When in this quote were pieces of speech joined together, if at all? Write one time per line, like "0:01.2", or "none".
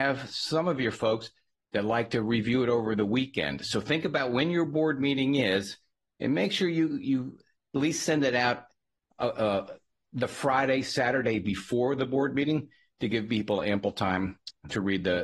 none